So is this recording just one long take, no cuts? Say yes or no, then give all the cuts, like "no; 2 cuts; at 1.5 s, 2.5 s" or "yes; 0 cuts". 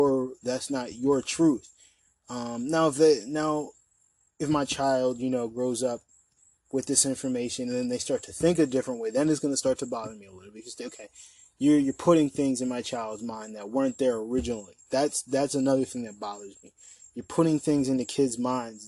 yes; 0 cuts